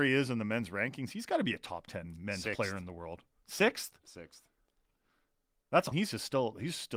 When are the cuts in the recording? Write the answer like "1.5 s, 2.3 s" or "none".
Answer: 5.9 s